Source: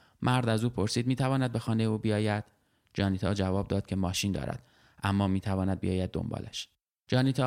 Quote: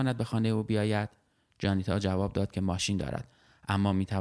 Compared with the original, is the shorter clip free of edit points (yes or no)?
yes